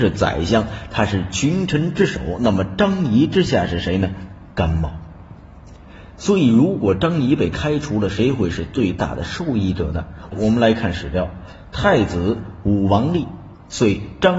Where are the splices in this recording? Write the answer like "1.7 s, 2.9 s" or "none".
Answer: 10.3 s

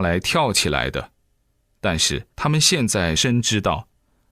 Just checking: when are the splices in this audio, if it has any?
3.2 s

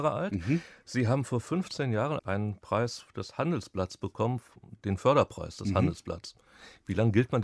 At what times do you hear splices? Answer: 2.2 s

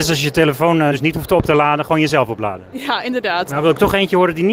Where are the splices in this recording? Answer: 0.9 s, 3.5 s

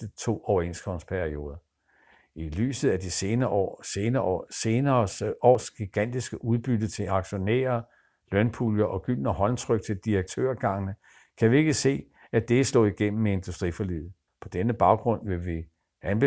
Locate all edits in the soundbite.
14.3 s

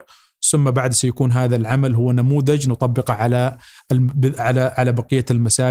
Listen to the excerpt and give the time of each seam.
none

